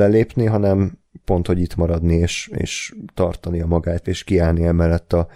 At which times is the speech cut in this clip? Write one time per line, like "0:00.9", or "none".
0:04.0